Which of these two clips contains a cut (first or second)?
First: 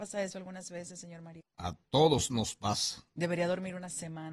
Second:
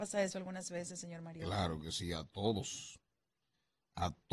first